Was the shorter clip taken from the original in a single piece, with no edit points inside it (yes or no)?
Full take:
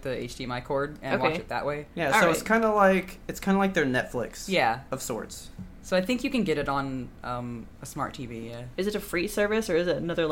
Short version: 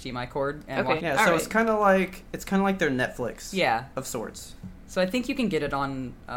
no